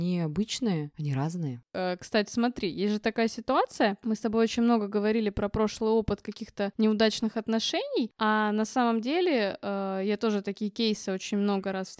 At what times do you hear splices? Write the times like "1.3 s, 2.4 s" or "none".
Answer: none